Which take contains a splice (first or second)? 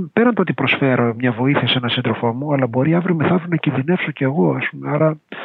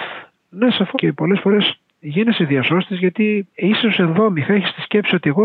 second